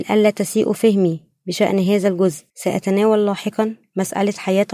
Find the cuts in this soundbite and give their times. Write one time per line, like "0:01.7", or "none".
0:02.5